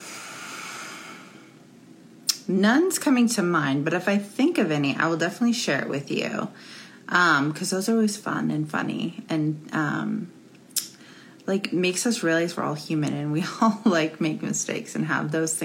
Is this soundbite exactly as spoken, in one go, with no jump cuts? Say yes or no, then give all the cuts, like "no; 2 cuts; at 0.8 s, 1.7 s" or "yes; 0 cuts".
yes; 0 cuts